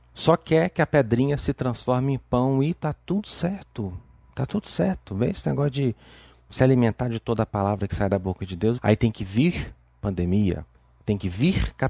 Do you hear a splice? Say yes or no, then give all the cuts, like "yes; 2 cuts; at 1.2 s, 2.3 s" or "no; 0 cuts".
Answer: yes; 1 cut; at 8.8 s